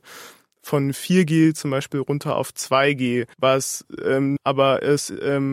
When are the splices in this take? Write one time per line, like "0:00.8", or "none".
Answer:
0:03.3
0:04.4